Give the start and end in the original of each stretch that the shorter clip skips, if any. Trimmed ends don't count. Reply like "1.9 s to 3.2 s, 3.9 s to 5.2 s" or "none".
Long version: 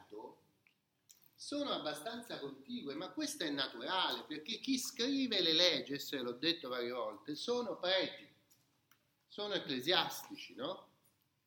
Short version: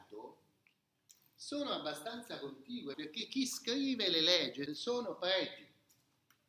2.9 s to 4.3 s, 6.0 s to 7.3 s

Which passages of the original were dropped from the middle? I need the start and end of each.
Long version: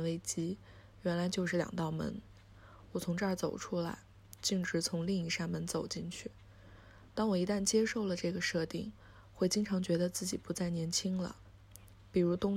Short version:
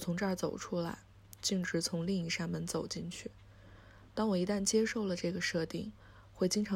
none

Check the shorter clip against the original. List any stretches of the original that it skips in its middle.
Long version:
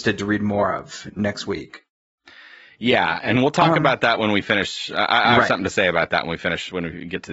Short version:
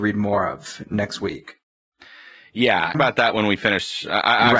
3.2 s to 3.8 s

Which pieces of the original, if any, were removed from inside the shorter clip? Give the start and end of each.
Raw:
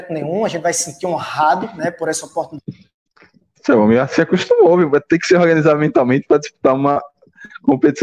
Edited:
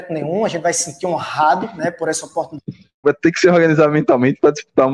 3.0 s to 4.9 s

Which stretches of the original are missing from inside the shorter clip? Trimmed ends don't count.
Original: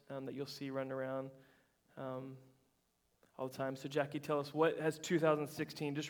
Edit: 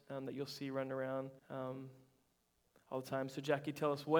1.4 s to 1.9 s

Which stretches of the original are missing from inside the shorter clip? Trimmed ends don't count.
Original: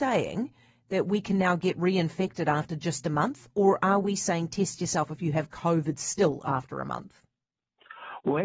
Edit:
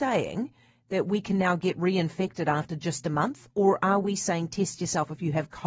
none

